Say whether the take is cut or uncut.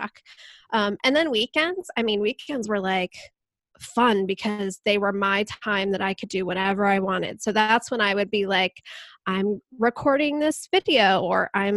uncut